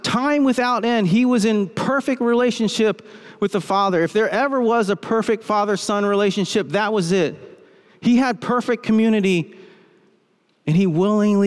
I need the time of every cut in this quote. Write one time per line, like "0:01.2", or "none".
none